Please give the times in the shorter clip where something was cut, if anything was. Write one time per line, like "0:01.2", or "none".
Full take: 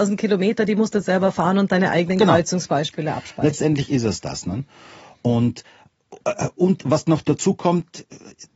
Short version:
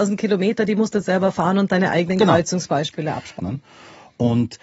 0:03.4